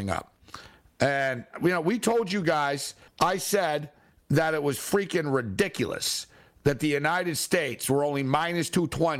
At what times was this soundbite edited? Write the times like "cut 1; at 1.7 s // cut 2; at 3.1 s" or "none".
cut 1; at 3.1 s